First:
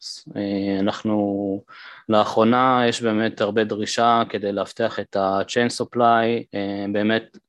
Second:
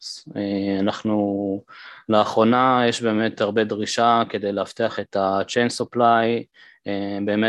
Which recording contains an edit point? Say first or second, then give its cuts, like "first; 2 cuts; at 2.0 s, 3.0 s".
first; 1 cut; at 6.5 s